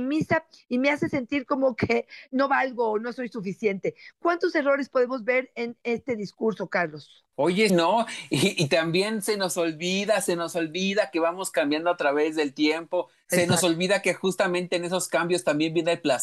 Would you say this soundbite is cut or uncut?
cut